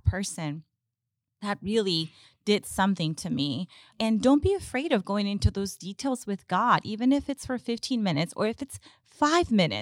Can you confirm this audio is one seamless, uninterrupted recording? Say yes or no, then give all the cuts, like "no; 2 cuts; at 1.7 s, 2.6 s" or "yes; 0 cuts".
yes; 0 cuts